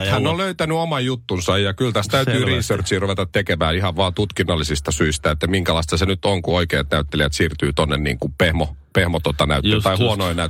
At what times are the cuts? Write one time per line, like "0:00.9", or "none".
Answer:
none